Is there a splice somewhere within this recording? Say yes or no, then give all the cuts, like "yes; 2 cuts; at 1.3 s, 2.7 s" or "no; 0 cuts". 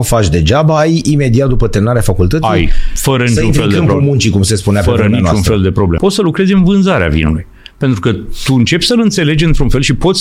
yes; 1 cut; at 6.0 s